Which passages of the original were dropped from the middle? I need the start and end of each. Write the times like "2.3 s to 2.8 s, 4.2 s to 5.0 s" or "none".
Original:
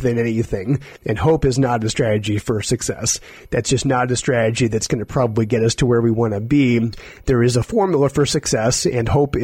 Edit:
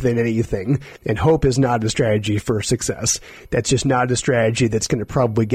none